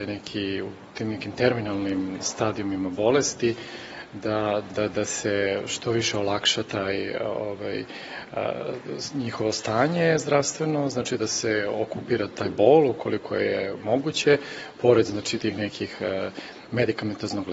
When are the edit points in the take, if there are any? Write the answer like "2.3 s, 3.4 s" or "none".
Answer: 4.7 s